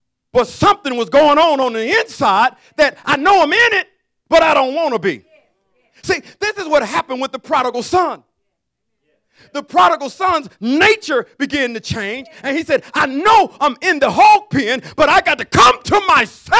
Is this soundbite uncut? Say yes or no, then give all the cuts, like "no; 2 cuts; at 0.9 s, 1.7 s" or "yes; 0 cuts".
yes; 0 cuts